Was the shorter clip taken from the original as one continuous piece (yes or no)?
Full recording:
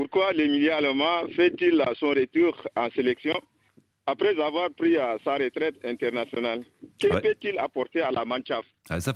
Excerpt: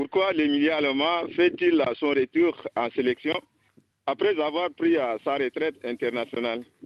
yes